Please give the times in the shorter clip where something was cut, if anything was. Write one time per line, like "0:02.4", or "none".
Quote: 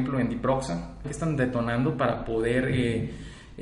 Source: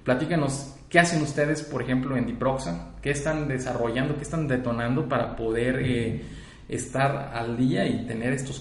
0:01.0